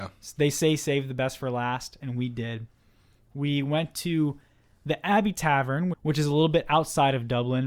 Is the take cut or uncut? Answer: cut